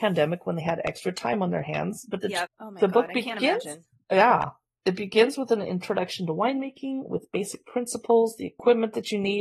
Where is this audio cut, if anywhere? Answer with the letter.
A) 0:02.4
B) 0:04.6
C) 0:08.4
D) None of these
A